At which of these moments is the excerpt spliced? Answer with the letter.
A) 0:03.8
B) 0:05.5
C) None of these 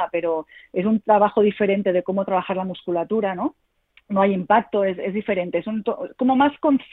C